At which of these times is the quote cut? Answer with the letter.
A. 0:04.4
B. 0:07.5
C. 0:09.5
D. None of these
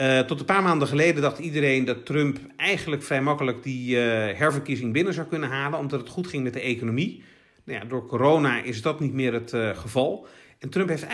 D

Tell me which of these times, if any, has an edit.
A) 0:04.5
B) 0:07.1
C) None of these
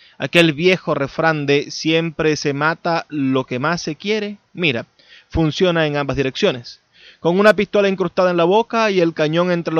A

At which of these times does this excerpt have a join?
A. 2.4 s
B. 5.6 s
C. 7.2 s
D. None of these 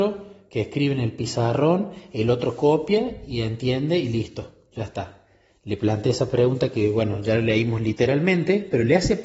B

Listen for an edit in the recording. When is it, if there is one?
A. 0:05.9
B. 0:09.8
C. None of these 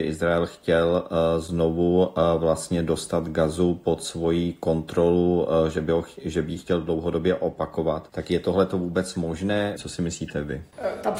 B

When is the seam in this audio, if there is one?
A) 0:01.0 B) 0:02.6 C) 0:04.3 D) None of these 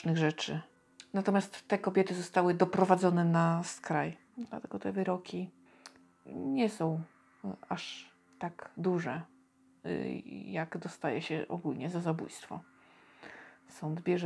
C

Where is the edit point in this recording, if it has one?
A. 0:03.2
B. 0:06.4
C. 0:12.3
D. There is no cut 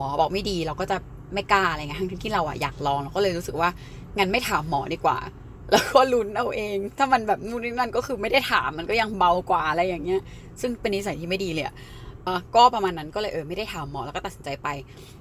C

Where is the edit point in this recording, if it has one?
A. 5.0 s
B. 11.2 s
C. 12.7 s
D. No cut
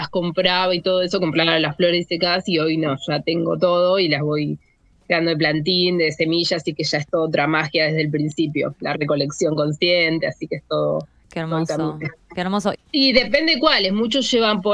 C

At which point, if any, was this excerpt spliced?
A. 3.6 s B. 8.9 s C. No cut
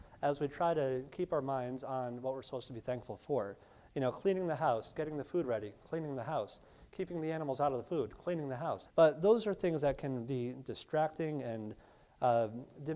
B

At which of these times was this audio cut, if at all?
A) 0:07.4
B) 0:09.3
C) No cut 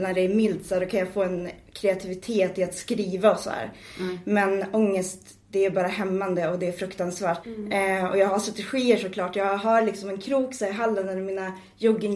A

